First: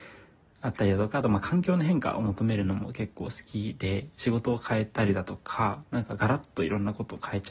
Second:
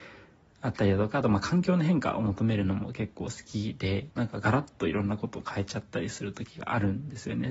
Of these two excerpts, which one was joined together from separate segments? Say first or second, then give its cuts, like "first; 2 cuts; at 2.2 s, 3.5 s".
second; 1 cut; at 4.1 s